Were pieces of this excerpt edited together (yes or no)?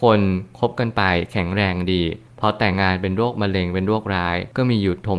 yes